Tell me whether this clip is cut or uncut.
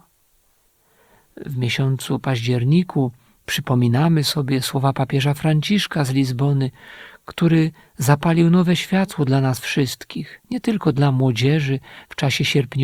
uncut